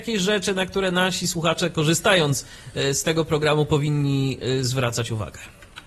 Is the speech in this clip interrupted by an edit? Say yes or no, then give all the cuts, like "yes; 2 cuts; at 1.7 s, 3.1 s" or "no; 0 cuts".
no; 0 cuts